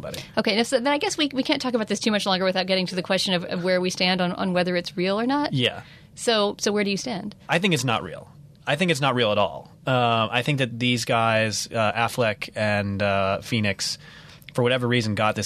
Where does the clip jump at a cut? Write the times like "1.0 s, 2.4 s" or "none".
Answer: none